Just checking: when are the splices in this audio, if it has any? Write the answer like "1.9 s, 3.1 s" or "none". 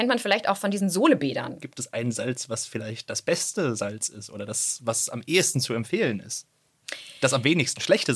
1.6 s